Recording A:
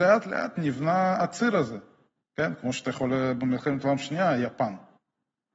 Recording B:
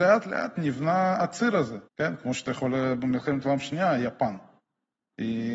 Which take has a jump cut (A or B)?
B